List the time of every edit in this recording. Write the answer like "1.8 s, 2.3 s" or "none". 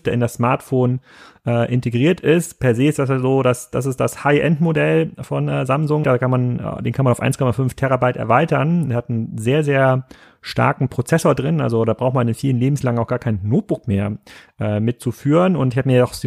6.0 s